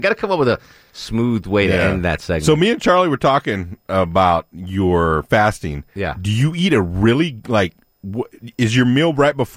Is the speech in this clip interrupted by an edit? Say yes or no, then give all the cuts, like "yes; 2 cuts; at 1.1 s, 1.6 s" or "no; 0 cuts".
no; 0 cuts